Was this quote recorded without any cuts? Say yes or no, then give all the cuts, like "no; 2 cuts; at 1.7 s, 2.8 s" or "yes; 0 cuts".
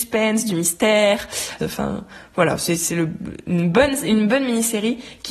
no; 2 cuts; at 1.6 s, 2.8 s